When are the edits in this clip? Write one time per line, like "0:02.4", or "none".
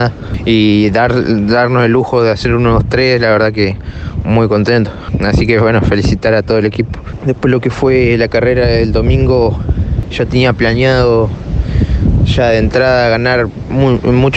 none